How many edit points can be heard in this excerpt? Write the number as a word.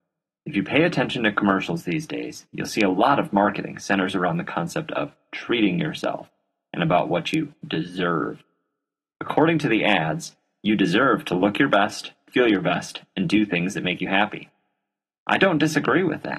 zero